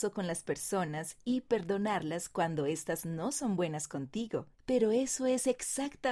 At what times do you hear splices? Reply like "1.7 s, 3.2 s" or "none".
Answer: 4.5 s